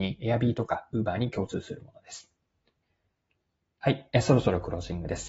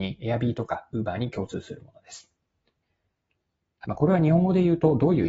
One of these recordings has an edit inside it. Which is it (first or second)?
second